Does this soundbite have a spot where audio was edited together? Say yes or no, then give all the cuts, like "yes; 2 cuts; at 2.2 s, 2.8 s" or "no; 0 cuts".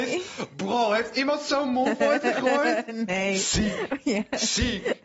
no; 0 cuts